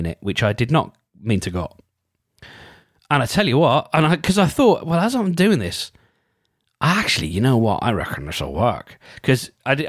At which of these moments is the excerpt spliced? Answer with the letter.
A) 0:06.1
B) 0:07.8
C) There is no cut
C